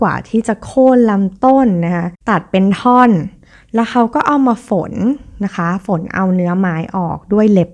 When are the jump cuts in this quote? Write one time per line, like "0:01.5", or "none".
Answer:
none